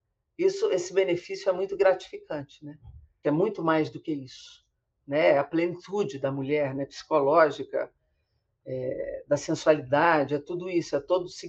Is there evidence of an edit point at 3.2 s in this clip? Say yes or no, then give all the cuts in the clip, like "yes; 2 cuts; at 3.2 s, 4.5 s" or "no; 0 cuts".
yes; 1 cut; at 3.2 s